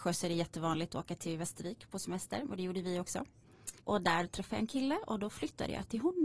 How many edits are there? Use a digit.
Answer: 1